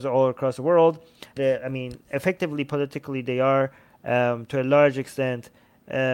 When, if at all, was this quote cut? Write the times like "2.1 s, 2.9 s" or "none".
1.4 s